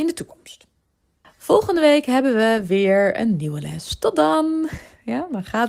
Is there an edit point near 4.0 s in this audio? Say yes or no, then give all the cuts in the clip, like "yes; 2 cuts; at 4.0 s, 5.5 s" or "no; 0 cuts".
no; 1 cut; at 1.2 s